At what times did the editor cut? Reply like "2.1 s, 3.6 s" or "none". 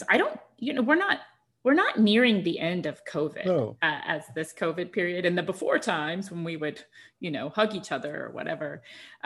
3.8 s